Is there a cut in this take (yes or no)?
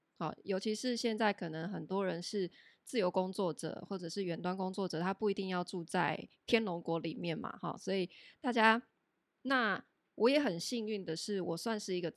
yes